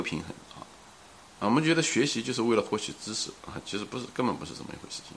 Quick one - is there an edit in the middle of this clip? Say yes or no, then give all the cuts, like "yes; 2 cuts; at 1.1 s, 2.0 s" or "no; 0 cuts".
no; 0 cuts